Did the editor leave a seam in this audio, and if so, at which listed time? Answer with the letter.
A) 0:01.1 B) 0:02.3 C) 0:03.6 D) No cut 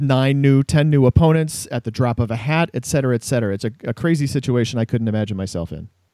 C